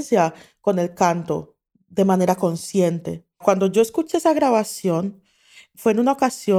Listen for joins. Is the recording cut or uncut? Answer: cut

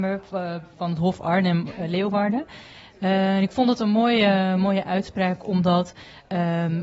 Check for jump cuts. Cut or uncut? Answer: uncut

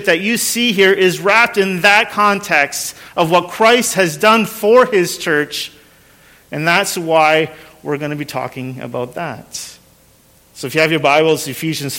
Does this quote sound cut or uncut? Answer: uncut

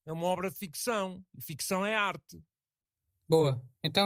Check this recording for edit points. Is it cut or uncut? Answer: uncut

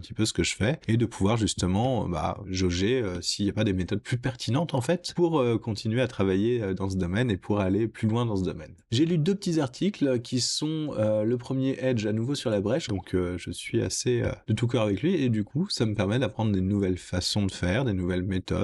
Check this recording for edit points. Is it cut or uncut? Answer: cut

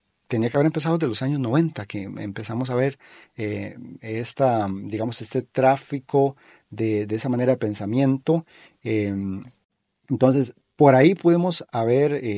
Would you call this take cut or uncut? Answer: uncut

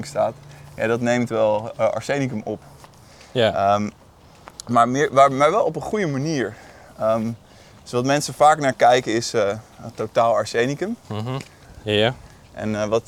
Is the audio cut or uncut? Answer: cut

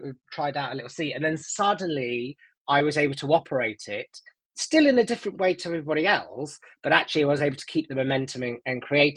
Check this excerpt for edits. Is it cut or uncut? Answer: uncut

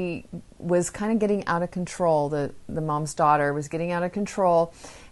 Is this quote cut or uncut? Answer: uncut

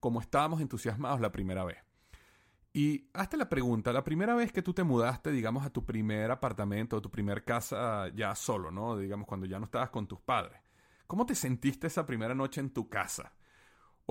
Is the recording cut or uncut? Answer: uncut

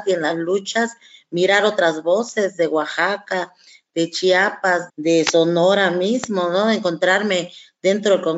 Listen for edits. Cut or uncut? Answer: cut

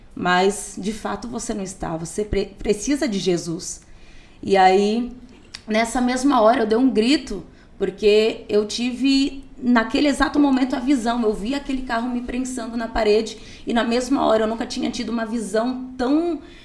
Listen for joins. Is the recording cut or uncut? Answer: uncut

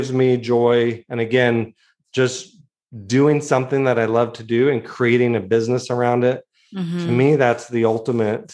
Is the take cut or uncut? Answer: uncut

